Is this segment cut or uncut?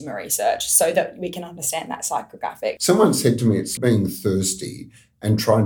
cut